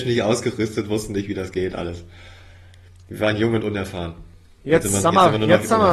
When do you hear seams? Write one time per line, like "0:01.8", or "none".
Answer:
none